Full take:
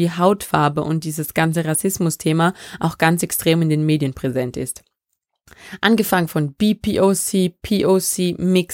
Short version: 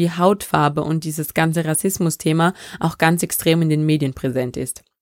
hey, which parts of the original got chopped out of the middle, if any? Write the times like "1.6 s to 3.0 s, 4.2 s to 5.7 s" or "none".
none